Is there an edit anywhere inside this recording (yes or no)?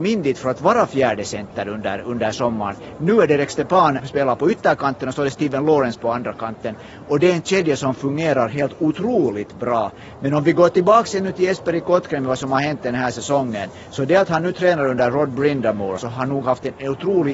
yes